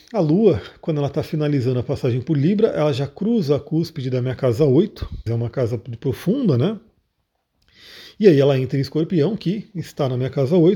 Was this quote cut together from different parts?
yes; 1 cut; at 5.3 s

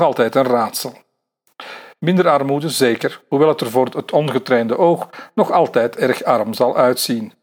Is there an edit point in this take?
yes; 1 cut; at 2.0 s

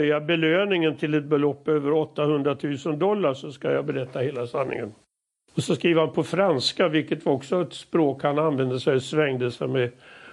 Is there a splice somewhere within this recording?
no; 0 cuts

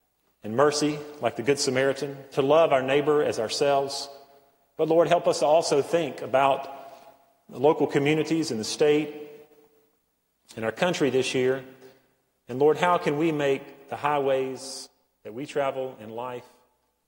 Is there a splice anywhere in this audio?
no; 0 cuts

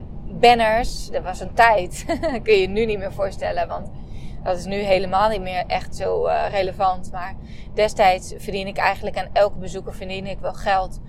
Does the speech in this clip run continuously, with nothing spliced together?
yes; 0 cuts

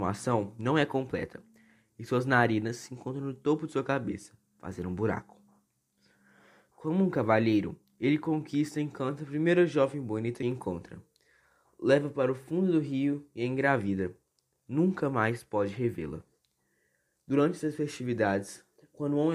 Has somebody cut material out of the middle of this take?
no; 0 cuts

